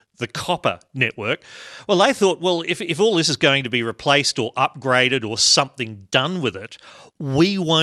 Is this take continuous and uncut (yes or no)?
yes